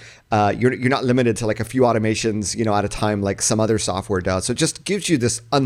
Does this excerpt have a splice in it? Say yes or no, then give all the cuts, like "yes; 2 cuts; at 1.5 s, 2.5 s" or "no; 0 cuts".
no; 0 cuts